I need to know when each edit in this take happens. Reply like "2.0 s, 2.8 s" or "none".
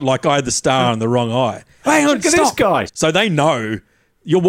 1.8 s, 2.9 s